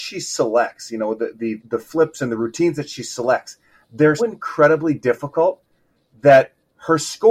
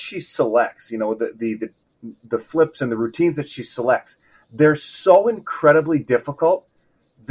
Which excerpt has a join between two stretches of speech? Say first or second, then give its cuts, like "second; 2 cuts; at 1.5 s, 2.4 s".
first; 2 cuts; at 1.6 s, 4.2 s